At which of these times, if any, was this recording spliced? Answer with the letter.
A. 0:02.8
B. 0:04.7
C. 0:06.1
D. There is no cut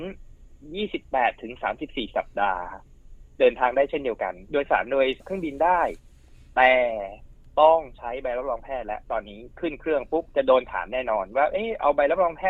D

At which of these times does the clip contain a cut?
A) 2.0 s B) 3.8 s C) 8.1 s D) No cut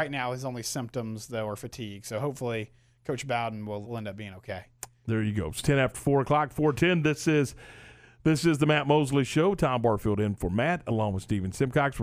B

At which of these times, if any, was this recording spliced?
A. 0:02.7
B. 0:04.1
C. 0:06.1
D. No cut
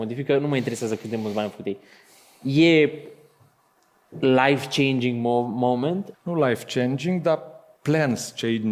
C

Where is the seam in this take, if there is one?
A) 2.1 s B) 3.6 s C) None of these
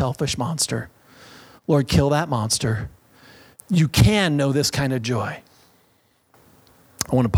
B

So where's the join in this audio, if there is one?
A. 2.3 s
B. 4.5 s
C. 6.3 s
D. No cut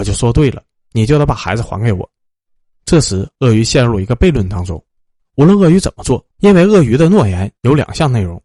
C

